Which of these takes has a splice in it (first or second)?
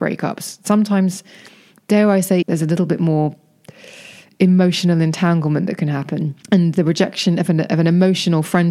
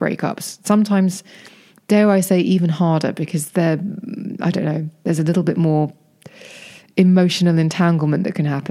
first